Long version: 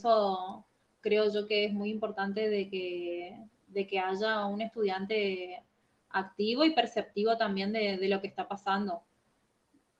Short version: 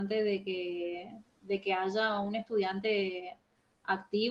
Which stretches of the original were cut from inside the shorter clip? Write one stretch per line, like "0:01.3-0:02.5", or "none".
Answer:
none